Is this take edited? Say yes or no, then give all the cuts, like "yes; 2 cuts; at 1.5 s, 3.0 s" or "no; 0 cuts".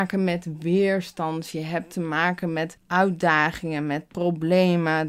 no; 0 cuts